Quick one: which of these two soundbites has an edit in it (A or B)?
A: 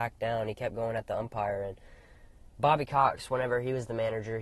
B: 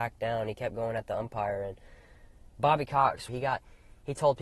B